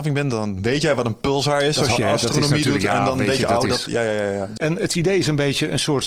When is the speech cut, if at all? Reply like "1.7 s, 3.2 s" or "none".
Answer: 2.0 s, 4.6 s